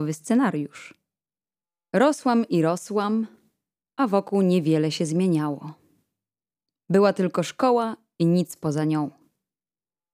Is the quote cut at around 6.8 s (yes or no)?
no